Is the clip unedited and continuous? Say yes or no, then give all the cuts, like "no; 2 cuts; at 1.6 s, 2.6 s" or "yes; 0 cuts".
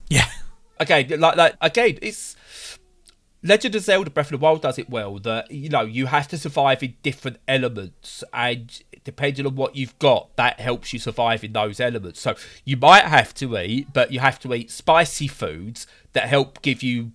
no; 1 cut; at 1.5 s